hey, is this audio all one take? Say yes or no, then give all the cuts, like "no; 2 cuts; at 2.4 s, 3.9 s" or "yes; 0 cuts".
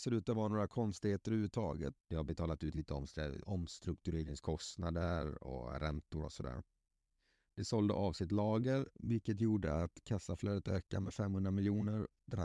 no; 1 cut; at 2.0 s